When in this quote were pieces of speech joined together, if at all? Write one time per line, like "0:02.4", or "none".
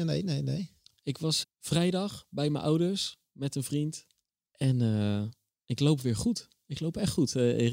0:01.4
0:04.5